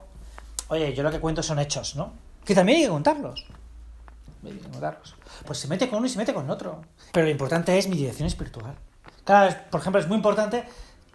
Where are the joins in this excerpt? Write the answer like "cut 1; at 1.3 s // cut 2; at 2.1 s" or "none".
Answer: cut 1; at 5.4 s // cut 2; at 7.1 s // cut 3; at 9.1 s